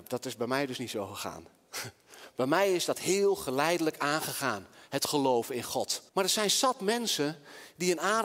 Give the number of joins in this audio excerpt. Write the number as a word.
one